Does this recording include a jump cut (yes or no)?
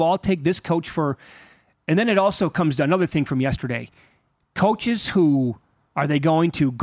no